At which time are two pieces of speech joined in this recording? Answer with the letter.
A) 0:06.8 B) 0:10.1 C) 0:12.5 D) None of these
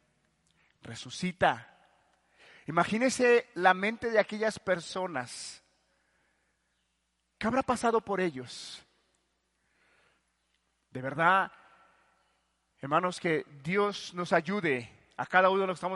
D